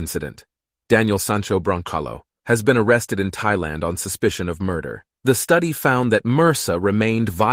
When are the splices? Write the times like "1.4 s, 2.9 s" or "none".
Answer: 2.4 s, 5.2 s